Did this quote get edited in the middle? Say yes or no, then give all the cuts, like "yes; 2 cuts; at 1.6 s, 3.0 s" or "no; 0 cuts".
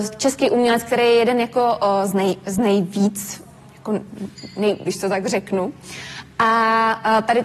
yes; 1 cut; at 4.9 s